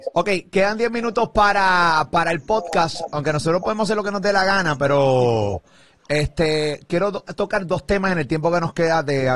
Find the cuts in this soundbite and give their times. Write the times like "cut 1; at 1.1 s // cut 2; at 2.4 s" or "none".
none